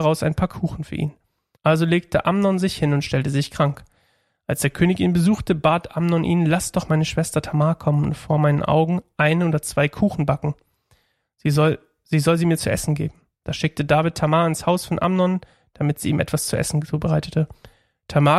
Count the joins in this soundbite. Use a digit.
1